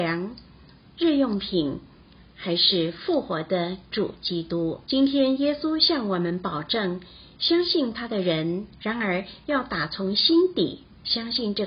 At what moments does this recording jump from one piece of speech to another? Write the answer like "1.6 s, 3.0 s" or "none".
4.8 s, 8.7 s

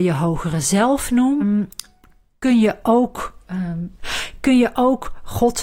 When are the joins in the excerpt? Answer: 1.4 s, 4.0 s

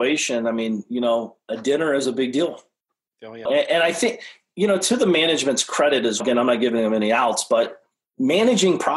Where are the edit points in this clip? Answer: 3.5 s, 6.2 s

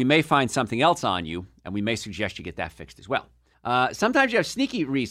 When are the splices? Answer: 3.5 s

